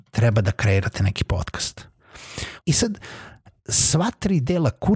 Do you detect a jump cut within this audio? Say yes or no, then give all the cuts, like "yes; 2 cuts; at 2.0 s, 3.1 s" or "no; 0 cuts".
yes; 1 cut; at 2.6 s